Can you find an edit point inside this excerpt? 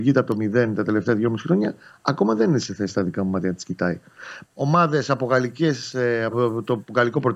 yes; 2 cuts; at 4.4 s, 6.3 s

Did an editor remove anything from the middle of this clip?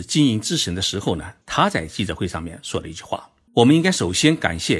yes; 2 cuts; at 1.4 s, 3.5 s

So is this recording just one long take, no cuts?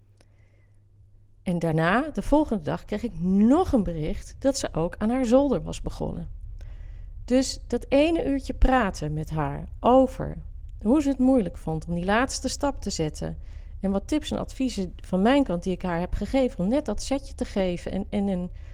yes; 0 cuts

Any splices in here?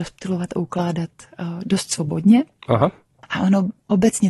no; 0 cuts

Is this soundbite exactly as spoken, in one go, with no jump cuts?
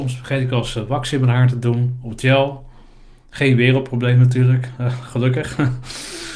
yes; 0 cuts

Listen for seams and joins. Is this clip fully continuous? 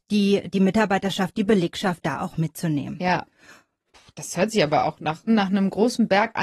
no; 1 cut; at 5.3 s

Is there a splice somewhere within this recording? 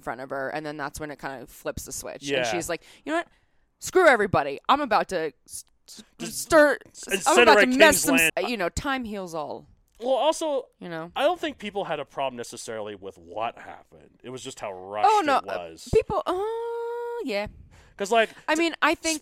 yes; 1 cut; at 8.3 s

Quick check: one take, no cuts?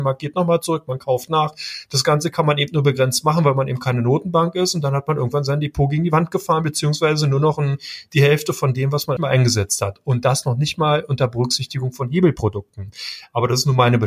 no; 1 cut; at 9.2 s

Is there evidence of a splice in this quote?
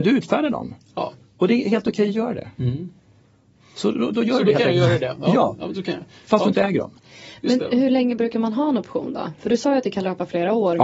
no; 0 cuts

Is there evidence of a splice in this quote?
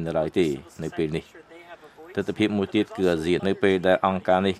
yes; 1 cut; at 3.4 s

